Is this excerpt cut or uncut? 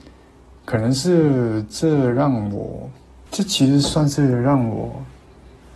cut